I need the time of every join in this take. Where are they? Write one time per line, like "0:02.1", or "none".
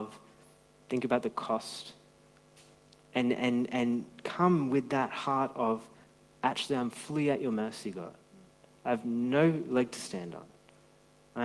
none